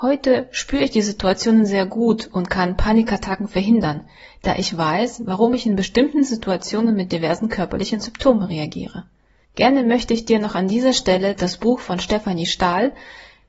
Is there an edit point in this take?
no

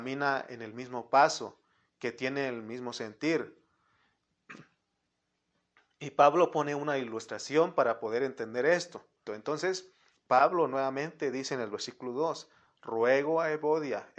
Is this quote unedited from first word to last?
no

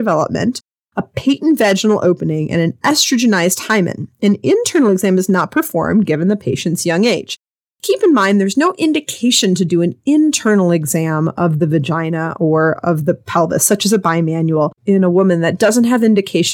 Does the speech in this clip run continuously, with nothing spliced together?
yes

